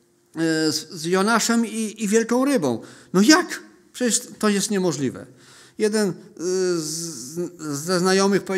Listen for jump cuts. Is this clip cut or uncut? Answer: uncut